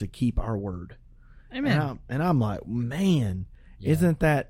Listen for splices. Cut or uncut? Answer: uncut